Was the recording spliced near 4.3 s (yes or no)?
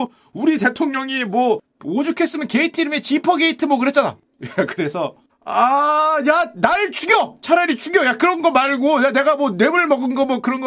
no